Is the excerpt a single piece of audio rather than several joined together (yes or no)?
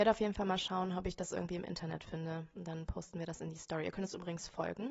yes